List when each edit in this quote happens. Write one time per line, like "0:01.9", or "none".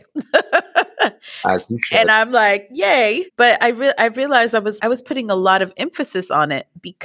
0:03.3
0:04.8